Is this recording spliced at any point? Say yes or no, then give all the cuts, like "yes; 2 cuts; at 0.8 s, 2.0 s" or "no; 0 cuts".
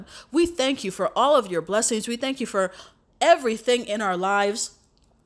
no; 0 cuts